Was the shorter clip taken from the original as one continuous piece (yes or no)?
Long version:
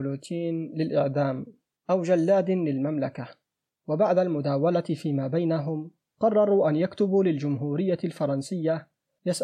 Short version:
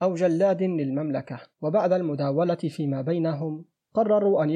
no